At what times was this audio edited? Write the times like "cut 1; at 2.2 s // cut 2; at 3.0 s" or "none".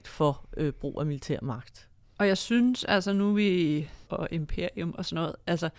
cut 1; at 2.0 s // cut 2; at 4.1 s